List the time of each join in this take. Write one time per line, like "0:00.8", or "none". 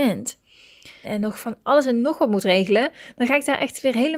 0:01.0